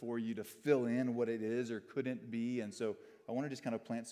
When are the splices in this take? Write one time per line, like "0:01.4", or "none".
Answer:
none